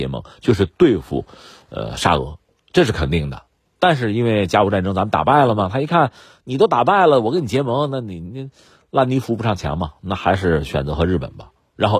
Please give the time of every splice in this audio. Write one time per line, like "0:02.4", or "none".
none